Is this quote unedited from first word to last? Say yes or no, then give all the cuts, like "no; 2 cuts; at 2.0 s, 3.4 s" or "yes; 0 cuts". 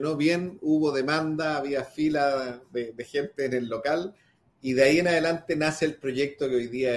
yes; 0 cuts